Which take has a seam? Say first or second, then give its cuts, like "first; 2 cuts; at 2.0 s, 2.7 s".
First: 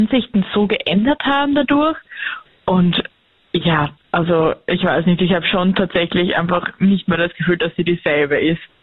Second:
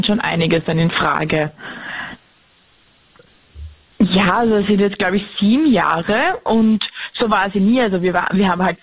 second; 1 cut; at 3.9 s